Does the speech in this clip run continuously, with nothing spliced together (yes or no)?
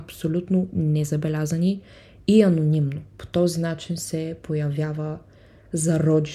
yes